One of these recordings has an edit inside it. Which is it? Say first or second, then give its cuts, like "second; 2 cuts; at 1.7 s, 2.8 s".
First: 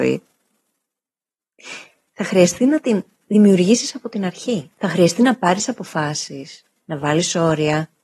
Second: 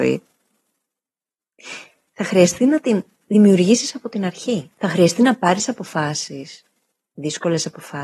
first; 1 cut; at 6.8 s